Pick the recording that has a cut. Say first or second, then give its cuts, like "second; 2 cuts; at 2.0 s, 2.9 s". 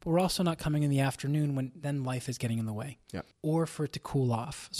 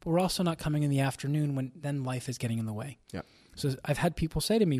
first; 1 cut; at 3.3 s